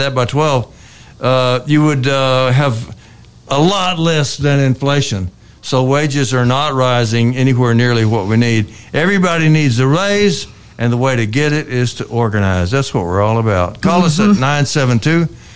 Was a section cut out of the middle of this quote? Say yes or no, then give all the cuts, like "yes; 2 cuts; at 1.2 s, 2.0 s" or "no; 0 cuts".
no; 0 cuts